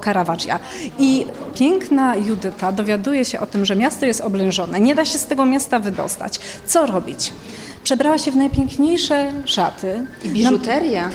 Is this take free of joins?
yes; 0 cuts

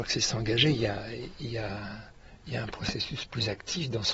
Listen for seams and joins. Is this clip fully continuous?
yes; 0 cuts

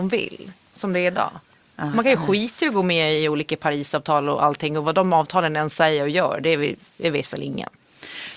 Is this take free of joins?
yes; 0 cuts

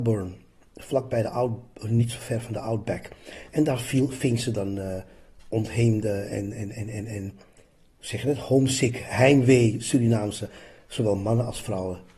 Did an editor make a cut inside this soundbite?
no; 0 cuts

